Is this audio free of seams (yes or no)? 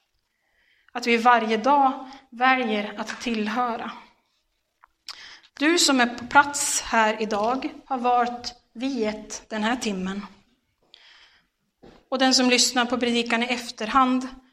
no